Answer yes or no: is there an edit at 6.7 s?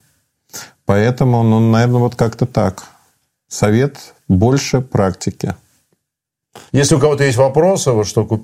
yes